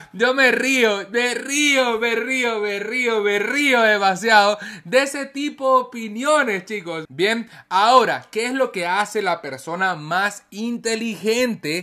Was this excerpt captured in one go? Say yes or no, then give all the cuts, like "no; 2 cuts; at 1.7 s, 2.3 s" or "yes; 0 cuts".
no; 1 cut; at 7.1 s